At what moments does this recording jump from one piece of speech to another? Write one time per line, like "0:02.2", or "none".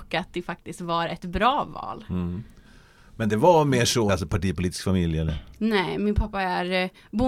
0:04.1

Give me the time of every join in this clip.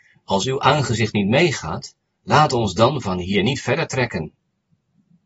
none

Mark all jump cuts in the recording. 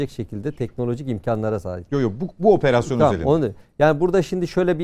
none

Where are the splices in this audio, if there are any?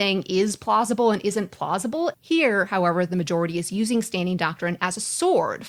0:02.1

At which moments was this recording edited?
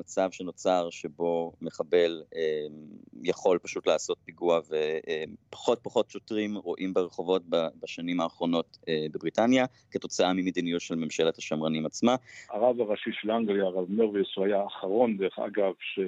0:12.5

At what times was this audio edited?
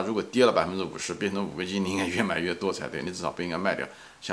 none

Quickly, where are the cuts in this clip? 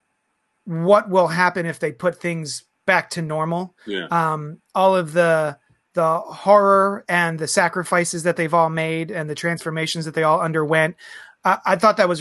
none

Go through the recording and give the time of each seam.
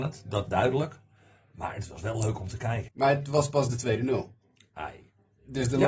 0:02.9

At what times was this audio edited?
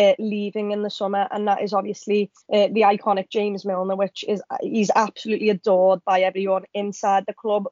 0:02.4

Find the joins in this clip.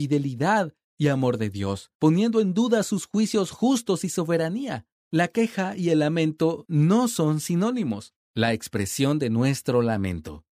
0:05.0
0:08.2

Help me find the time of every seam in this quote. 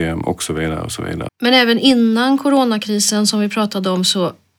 0:01.3

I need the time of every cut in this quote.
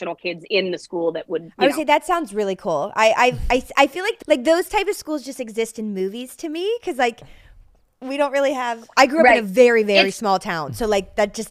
0:04.2

